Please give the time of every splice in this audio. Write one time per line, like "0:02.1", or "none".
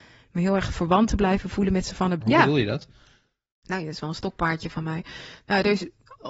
0:02.2